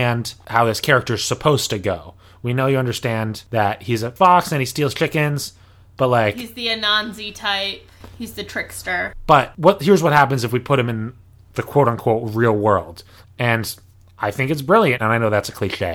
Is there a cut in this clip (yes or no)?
yes